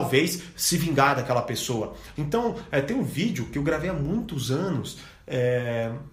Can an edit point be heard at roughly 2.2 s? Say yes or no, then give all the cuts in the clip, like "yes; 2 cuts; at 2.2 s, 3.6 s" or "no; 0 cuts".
yes; 1 cut; at 2.2 s